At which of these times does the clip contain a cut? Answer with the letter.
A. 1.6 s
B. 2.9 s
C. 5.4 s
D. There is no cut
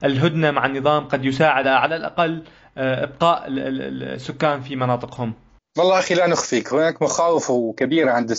A